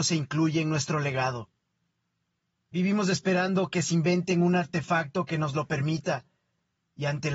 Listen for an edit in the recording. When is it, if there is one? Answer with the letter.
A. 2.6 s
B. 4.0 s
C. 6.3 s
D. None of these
A